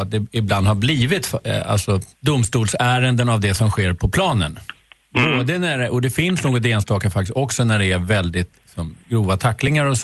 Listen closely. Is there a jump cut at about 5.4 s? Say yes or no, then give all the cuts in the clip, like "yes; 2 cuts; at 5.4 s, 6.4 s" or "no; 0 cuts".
no; 1 cut; at 2.1 s